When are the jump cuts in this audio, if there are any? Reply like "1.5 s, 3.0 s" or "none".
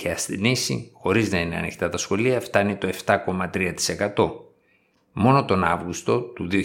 none